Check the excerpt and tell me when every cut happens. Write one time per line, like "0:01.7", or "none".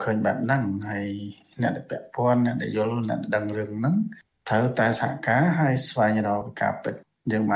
none